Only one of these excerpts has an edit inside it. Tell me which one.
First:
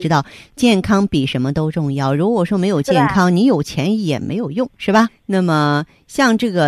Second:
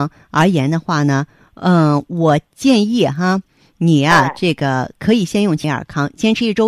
first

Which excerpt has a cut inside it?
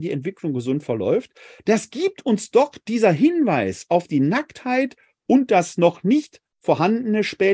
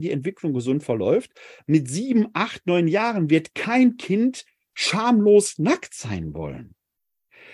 first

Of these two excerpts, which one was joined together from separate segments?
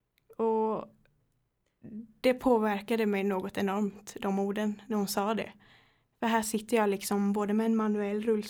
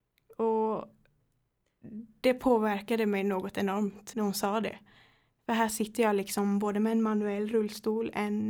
second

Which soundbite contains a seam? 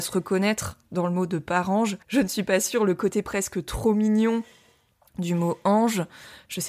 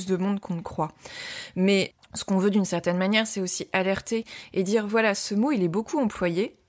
first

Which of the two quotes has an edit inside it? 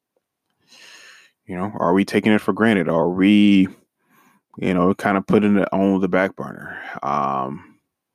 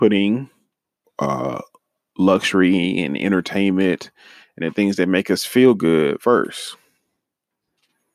second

